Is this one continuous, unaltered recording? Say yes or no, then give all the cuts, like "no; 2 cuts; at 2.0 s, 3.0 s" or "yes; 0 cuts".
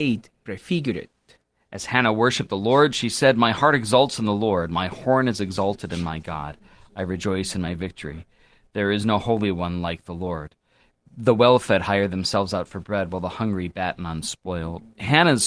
yes; 0 cuts